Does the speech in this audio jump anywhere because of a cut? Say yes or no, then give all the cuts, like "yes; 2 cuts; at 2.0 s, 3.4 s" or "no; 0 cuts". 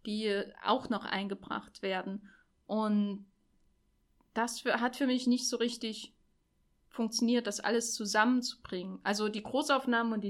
no; 0 cuts